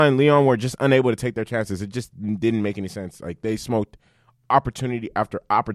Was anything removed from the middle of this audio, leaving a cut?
no; 0 cuts

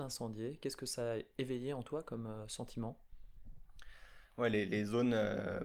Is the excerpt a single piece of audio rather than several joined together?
yes; 0 cuts

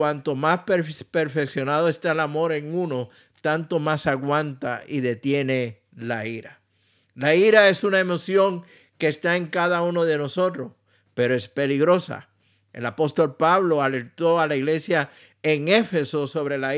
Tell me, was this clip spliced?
no; 0 cuts

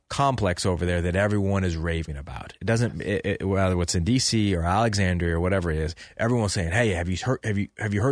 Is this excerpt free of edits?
yes; 0 cuts

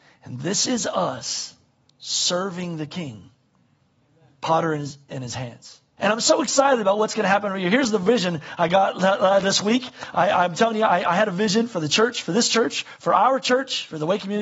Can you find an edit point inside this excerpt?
yes; 1 cut; at 6.0 s

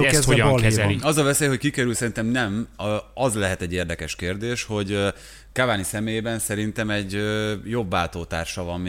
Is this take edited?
no; 0 cuts

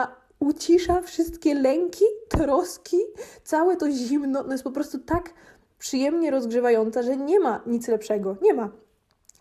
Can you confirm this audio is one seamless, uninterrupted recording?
yes; 0 cuts

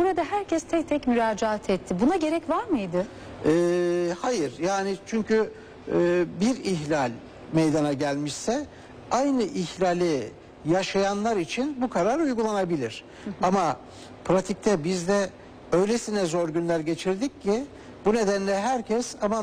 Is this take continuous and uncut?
yes; 0 cuts

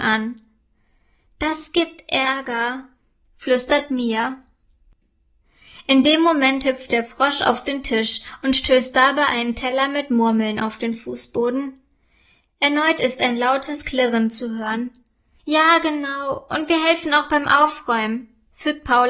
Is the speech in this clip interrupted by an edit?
yes; 1 cut; at 15.4 s

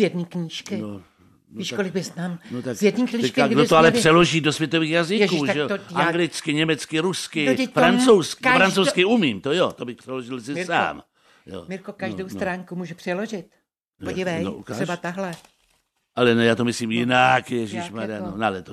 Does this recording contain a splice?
no; 0 cuts

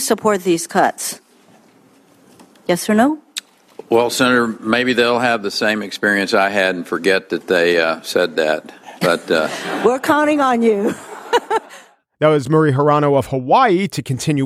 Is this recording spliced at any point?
no; 0 cuts

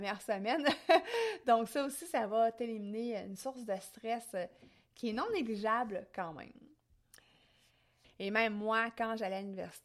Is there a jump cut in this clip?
yes; 1 cut; at 8.0 s

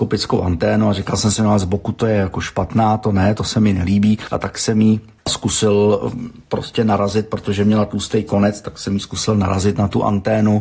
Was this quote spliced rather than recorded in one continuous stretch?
no; 0 cuts

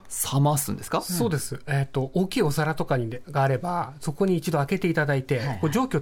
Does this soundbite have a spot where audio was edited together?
no; 0 cuts

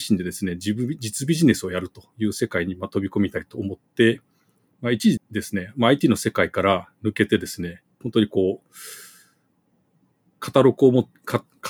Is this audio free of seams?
no; 2 cuts; at 5.2 s, 8.0 s

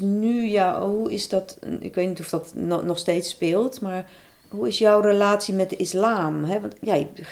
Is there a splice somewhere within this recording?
no; 0 cuts

